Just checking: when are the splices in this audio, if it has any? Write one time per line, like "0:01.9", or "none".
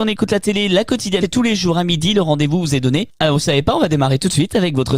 0:01.2